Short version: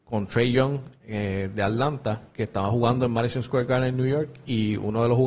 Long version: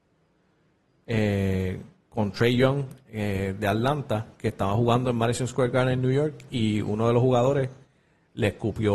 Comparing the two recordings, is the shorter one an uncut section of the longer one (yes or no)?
yes